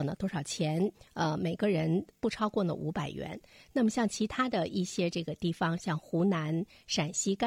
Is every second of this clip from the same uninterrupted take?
no; 1 cut; at 0.9 s

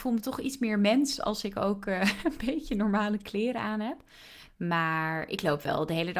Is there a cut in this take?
yes; 1 cut; at 4.5 s

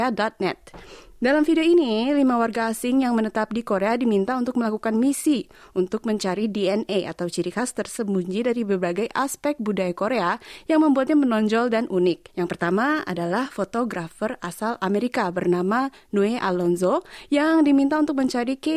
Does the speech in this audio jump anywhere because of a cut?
yes; 1 cut; at 12.3 s

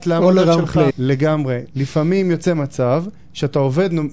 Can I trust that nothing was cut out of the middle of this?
no; 1 cut; at 0.9 s

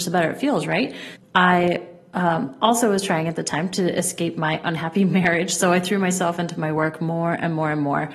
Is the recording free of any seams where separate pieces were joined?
no; 1 cut; at 1.2 s

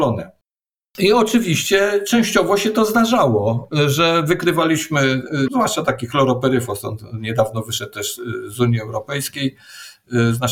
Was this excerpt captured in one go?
no; 1 cut; at 5.5 s

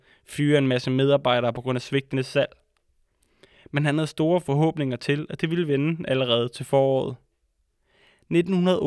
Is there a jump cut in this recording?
no; 0 cuts

